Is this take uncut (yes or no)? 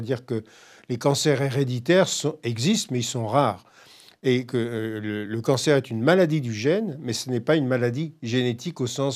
yes